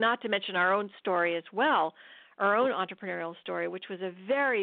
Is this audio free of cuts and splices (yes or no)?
yes